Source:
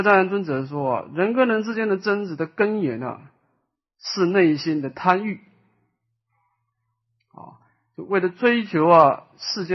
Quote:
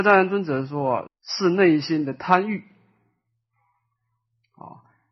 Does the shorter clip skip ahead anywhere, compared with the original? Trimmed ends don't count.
yes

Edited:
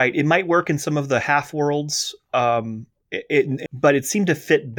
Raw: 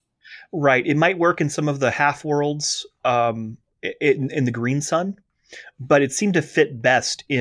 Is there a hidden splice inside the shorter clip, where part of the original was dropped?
yes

